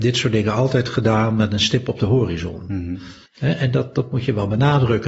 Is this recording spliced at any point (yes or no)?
yes